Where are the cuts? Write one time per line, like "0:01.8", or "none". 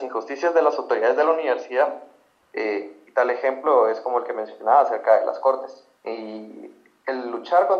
0:02.4
0:06.0